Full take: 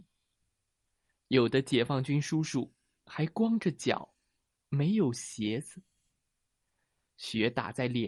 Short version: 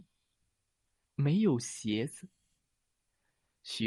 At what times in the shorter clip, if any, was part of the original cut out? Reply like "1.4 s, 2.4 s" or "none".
1.0 s